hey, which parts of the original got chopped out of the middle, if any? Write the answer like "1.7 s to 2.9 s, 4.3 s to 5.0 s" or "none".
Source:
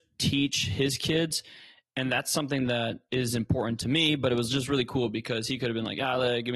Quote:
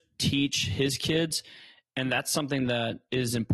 none